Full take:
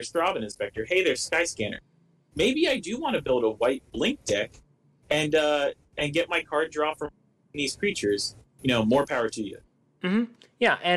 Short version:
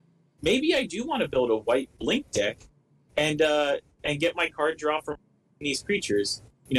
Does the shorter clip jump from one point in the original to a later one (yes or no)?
no